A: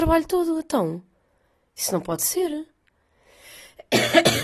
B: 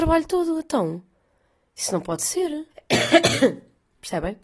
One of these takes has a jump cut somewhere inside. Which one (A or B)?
B